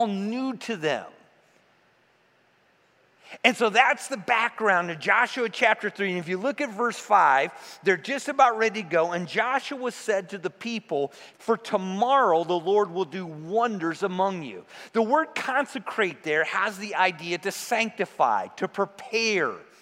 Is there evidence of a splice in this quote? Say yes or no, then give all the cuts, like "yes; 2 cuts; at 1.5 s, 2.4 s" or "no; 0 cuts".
yes; 1 cut; at 11.3 s